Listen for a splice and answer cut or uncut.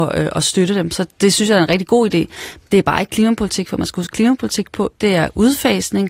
uncut